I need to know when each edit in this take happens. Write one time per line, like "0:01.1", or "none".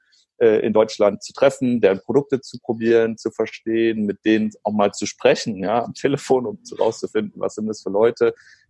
none